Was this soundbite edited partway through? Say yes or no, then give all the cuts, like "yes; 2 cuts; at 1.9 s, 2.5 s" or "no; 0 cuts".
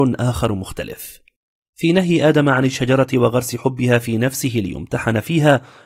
no; 0 cuts